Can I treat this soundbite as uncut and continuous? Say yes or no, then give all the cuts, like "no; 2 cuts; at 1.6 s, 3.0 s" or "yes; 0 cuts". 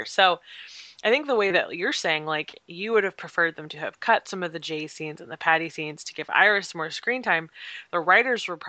yes; 0 cuts